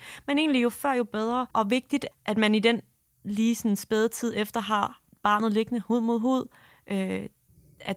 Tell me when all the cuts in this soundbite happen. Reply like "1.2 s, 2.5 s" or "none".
1.5 s